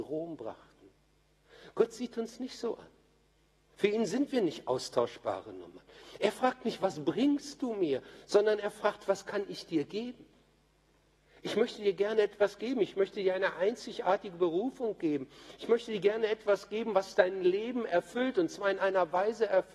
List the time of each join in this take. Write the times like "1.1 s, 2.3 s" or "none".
none